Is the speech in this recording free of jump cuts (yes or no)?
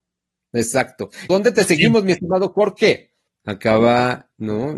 no